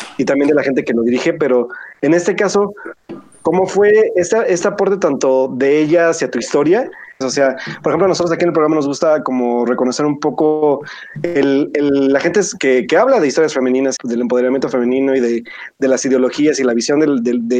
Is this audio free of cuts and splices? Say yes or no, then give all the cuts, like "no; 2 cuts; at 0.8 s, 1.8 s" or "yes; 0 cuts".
no; 2 cuts; at 7.2 s, 14.0 s